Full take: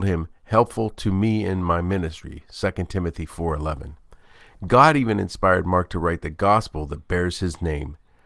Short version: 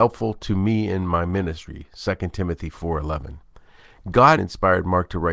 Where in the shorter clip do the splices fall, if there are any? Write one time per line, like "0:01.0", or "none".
0:04.4